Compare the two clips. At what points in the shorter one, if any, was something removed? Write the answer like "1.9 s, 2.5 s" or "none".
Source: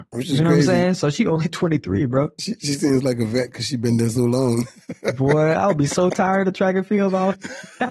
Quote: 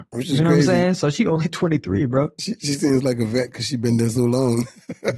none